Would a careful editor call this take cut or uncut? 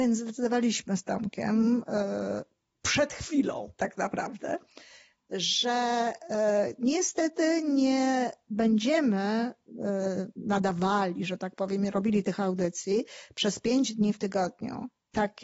uncut